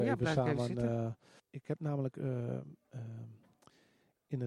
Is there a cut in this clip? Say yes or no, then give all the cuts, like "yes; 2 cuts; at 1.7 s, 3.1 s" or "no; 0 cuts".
yes; 1 cut; at 1.4 s